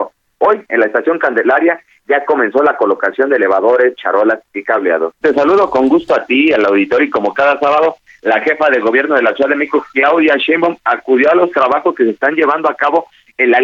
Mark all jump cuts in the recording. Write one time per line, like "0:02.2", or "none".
0:05.2